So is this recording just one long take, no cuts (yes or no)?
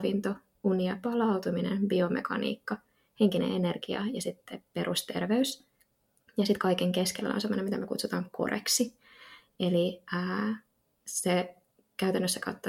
yes